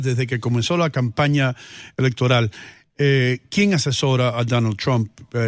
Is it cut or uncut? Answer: uncut